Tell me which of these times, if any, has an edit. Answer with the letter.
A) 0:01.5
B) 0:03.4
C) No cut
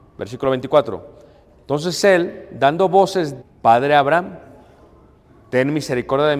B